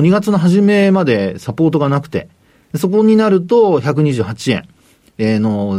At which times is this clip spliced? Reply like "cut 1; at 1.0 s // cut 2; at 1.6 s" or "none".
none